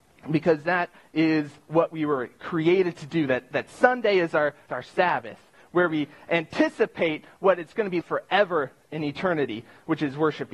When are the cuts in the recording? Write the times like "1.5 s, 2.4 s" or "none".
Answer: 4.7 s, 8.0 s